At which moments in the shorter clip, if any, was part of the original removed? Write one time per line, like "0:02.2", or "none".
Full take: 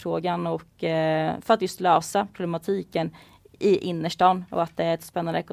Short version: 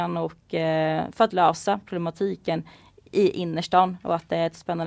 0:01.3